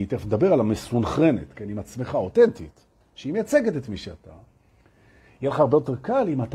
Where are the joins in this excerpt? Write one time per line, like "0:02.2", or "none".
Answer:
none